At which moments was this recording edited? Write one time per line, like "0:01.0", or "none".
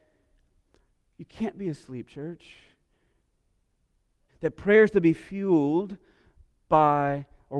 0:04.3

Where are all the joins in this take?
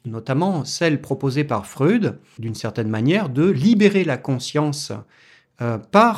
0:02.4

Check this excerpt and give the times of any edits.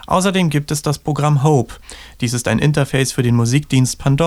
none

